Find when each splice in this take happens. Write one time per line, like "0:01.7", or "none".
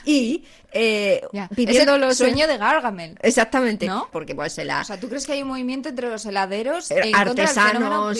0:04.1